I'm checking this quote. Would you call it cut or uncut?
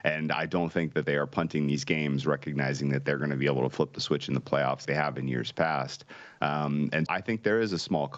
cut